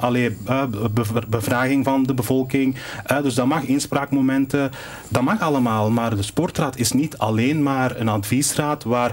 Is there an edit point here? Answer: no; 0 cuts

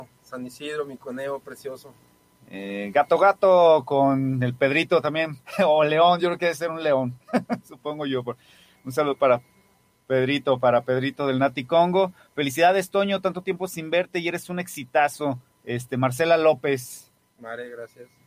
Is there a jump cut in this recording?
no; 0 cuts

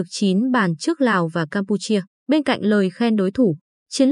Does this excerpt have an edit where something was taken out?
yes; 1 cut; at 2.2 s

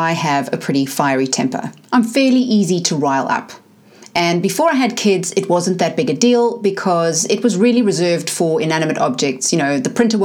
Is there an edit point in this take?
no; 0 cuts

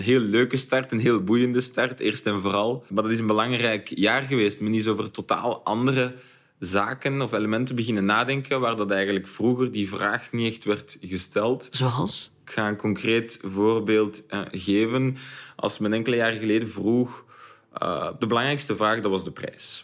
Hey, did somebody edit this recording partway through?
no; 0 cuts

